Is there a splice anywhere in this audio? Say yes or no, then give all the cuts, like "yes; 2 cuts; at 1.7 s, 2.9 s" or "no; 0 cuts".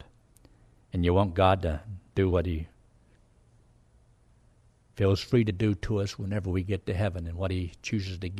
no; 0 cuts